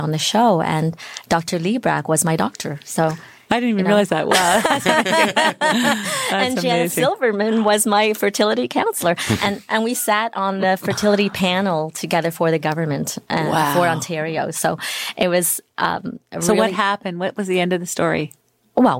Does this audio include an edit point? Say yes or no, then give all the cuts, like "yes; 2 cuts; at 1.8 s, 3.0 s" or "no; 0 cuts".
no; 0 cuts